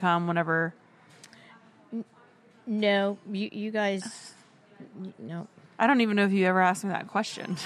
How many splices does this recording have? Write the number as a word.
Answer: zero